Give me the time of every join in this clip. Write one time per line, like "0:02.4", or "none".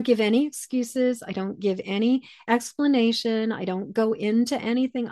none